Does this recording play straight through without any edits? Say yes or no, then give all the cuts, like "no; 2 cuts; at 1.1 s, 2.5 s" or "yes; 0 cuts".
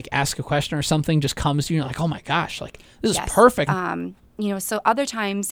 no; 1 cut; at 3.7 s